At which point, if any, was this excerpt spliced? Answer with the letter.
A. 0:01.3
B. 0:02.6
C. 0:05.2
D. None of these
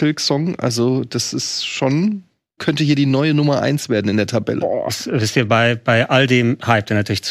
B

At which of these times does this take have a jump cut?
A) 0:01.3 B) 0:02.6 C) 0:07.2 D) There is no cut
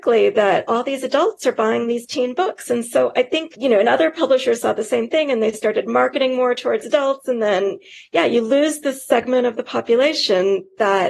D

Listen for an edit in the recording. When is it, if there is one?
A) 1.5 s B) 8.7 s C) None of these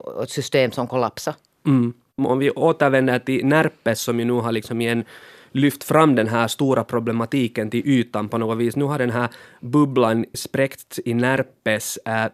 C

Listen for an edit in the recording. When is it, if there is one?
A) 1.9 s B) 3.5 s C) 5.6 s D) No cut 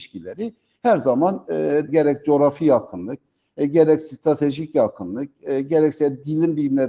A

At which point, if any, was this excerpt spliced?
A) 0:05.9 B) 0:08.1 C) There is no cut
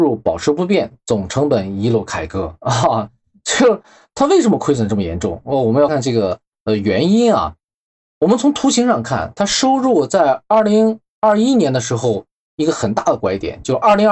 A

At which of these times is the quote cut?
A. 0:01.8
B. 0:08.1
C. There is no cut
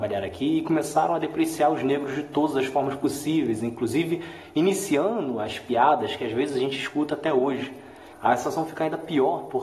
B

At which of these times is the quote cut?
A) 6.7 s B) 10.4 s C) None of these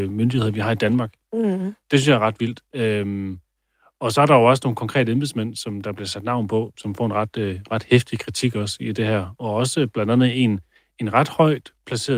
A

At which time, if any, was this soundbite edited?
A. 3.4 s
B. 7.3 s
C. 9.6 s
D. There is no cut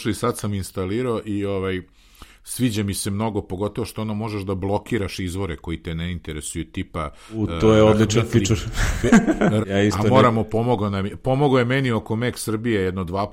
C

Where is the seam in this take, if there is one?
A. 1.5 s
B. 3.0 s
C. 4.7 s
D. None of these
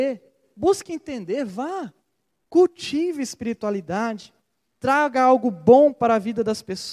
D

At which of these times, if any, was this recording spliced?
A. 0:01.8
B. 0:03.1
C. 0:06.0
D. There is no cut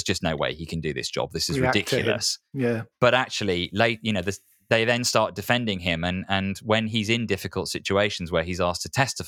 D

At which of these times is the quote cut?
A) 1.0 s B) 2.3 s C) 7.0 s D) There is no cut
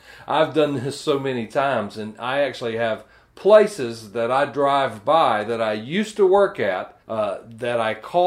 C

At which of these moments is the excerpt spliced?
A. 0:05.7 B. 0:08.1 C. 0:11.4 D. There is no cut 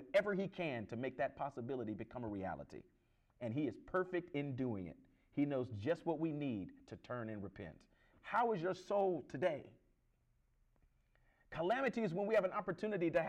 B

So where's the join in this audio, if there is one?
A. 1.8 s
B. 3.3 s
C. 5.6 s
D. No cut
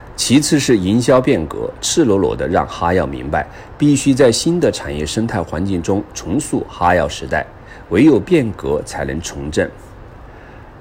A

